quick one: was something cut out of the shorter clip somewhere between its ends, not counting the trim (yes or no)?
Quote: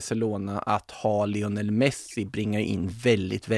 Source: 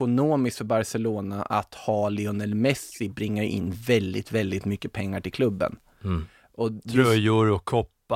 no